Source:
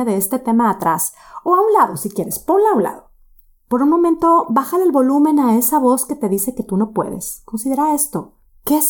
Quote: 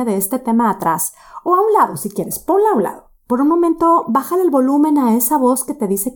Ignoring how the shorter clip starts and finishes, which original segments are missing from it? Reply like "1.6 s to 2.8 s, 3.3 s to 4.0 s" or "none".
3.2 s to 3.6 s